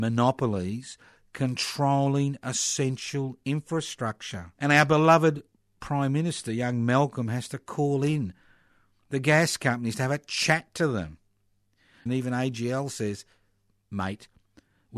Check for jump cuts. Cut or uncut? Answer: cut